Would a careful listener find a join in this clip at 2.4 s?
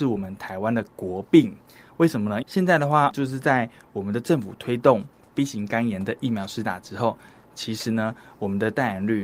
yes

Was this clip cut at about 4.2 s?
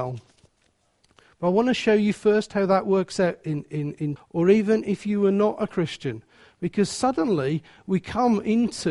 yes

